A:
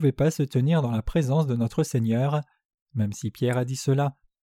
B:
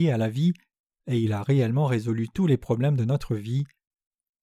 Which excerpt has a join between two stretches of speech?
A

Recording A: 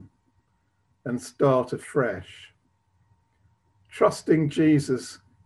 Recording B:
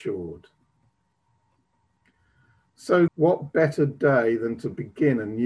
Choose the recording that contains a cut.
B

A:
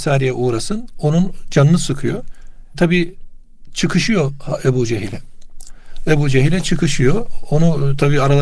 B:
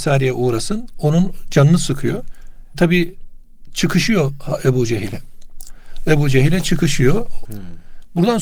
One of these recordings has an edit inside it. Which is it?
B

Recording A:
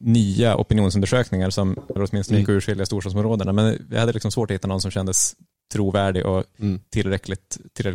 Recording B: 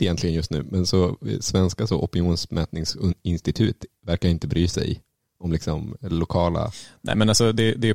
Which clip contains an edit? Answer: A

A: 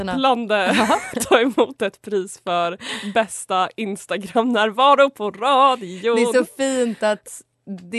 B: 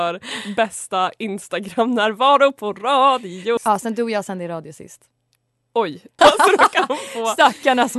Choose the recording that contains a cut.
B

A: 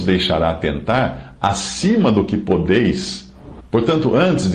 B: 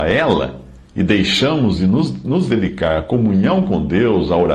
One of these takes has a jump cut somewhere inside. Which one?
A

